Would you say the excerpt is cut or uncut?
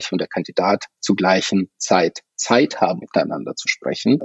cut